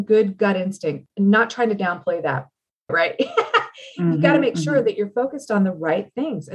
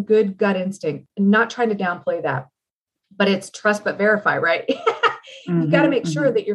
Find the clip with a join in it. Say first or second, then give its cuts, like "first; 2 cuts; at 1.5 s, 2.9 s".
first; 1 cut; at 2.9 s